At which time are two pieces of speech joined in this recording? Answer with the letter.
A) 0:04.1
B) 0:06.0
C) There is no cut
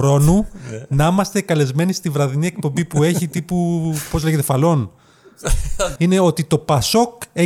B